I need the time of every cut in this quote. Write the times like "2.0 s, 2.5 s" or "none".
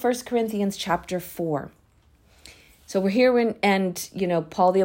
none